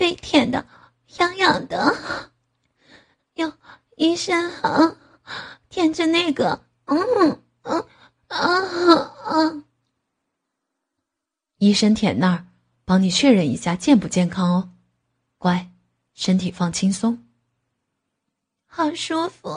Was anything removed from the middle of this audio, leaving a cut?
no; 0 cuts

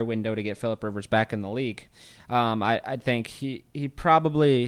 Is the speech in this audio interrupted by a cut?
no; 0 cuts

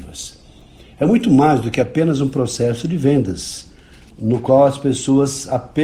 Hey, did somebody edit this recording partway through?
no; 0 cuts

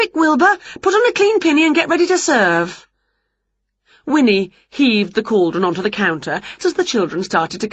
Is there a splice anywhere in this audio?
yes; 1 cut; at 6.6 s

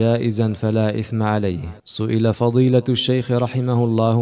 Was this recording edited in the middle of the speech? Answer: yes; 1 cut; at 1.8 s

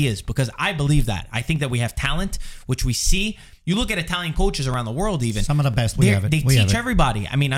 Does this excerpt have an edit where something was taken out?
yes; 1 cut; at 3.6 s

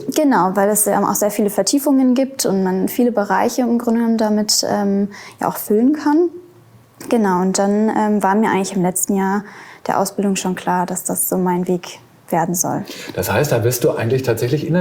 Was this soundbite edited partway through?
no; 0 cuts

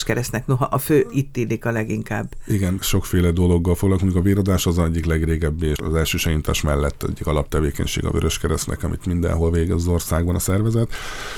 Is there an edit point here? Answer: no; 0 cuts

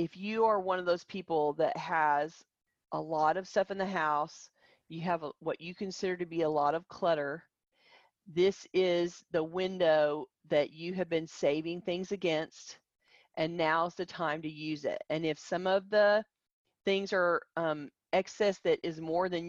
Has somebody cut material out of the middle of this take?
no; 0 cuts

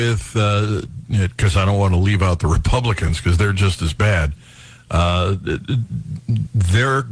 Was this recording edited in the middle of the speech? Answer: no; 0 cuts

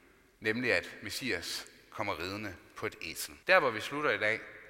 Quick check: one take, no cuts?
no; 1 cut; at 3.4 s

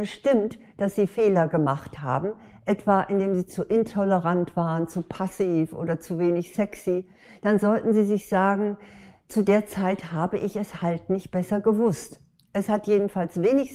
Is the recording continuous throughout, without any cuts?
yes; 0 cuts

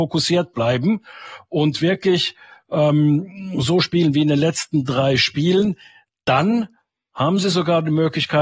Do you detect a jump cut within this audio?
no; 0 cuts

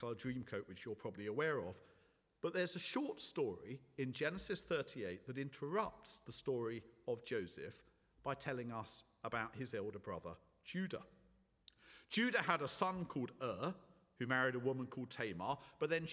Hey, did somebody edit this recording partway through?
no; 0 cuts

